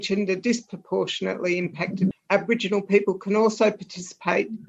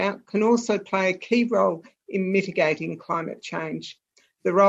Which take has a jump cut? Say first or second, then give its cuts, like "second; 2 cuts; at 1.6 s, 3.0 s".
first; 1 cut; at 2.1 s